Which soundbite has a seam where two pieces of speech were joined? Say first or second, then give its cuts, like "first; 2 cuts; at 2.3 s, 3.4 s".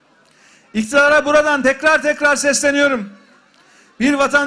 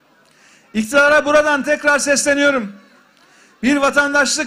second; 1 cut; at 1.6 s